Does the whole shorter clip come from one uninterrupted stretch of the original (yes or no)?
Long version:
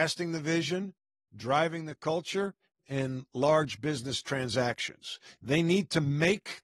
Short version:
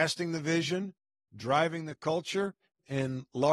yes